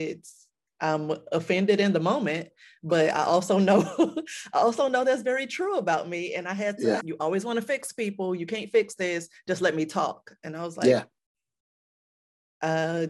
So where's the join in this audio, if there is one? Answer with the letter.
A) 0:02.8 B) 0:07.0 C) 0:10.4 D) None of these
B